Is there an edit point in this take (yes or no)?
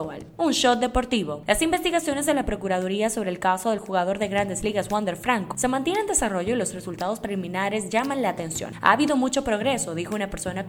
no